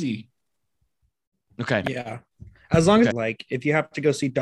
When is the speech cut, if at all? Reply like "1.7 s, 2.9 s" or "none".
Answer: 3.1 s